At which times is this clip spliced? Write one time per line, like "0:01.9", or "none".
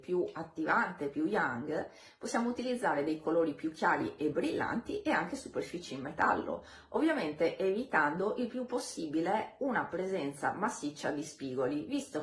none